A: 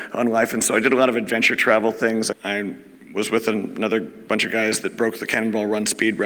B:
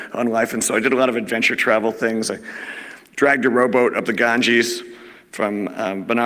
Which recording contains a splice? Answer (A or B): A